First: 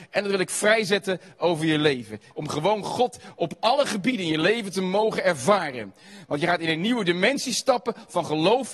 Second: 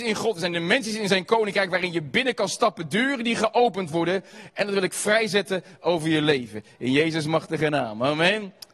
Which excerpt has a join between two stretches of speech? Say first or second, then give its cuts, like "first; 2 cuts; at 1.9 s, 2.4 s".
first; 1 cut; at 2.3 s